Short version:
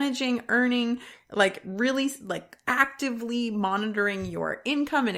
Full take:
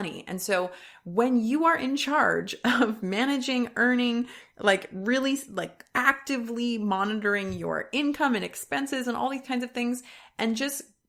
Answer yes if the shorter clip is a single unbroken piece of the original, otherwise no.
yes